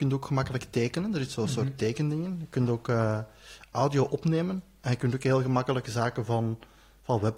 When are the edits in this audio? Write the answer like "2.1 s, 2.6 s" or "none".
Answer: none